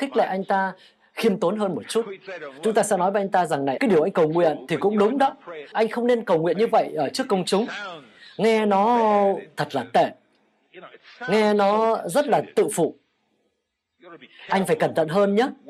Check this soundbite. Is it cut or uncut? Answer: cut